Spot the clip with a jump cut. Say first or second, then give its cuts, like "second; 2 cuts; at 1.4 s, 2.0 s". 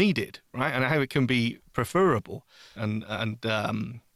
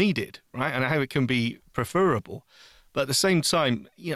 first; 1 cut; at 2.8 s